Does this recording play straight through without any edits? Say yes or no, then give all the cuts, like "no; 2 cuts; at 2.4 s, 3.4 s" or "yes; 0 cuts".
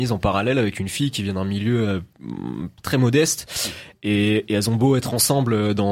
no; 1 cut; at 2.8 s